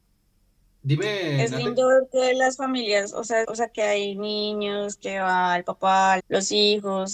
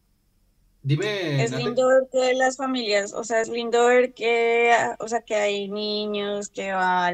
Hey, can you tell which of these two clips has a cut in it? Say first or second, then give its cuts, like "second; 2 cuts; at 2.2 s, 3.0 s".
first; 2 cuts; at 3.4 s, 6.2 s